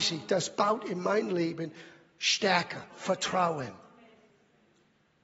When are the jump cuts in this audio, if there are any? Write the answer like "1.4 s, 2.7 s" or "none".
2.9 s